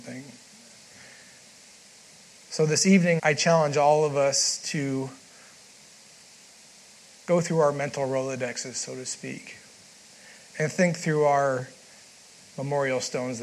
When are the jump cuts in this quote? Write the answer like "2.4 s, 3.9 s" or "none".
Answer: 3.2 s